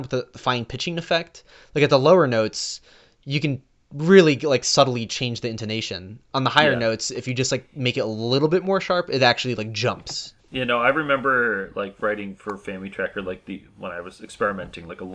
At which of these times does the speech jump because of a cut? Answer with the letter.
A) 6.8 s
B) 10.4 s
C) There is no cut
B